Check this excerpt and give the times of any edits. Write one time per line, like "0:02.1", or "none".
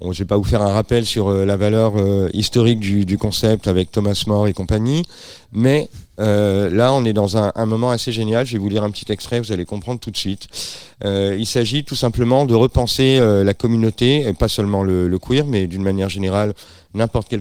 none